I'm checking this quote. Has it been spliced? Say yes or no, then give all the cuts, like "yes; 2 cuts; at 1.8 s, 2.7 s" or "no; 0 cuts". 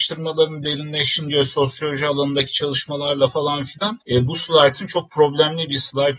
yes; 1 cut; at 4.0 s